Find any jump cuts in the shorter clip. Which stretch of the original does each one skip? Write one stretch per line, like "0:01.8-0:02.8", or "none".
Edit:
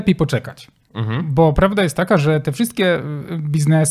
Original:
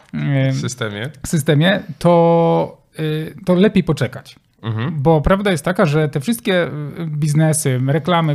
none